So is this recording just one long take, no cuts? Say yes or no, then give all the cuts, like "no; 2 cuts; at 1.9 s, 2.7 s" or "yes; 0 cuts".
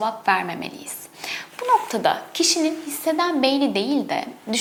yes; 0 cuts